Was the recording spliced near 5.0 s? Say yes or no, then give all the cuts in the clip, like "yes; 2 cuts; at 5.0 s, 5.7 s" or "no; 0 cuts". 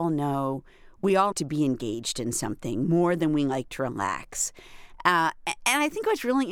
no; 1 cut; at 1.3 s